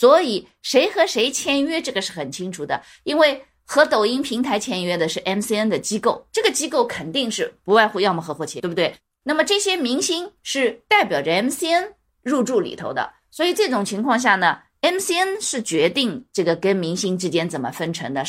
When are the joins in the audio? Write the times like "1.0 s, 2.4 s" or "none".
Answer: 8.6 s